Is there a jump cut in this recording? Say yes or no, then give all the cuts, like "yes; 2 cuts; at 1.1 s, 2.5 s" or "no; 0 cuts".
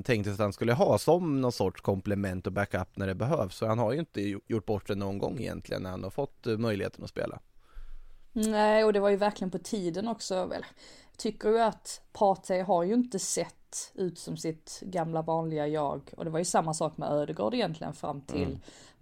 no; 0 cuts